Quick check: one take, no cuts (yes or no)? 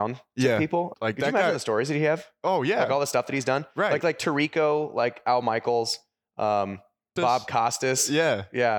no